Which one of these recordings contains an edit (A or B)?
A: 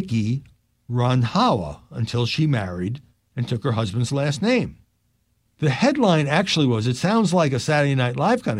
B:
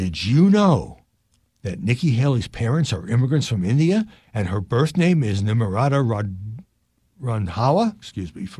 A